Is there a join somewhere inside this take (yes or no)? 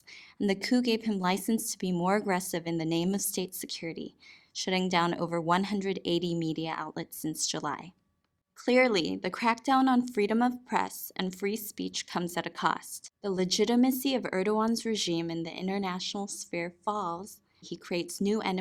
yes